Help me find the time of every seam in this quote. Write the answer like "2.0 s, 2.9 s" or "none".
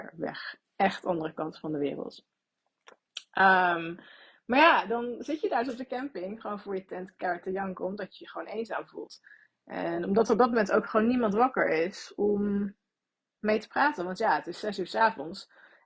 none